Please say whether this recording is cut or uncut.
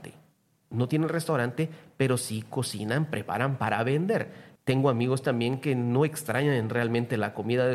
cut